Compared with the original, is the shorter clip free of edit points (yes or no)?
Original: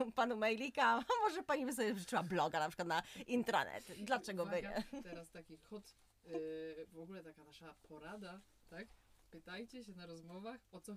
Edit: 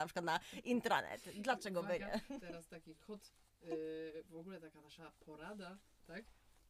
yes